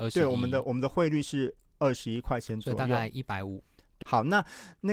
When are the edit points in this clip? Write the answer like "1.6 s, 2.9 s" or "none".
4.0 s